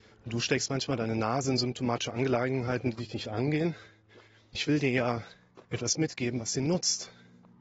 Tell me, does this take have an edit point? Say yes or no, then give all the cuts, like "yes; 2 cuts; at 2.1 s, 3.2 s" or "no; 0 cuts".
yes; 2 cuts; at 4.5 s, 5.6 s